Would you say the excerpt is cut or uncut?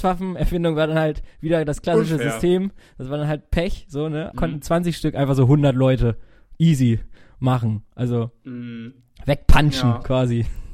cut